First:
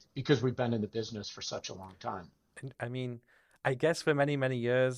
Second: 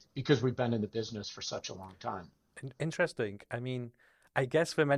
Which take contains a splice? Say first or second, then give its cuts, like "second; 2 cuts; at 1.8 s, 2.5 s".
first; 1 cut; at 2.7 s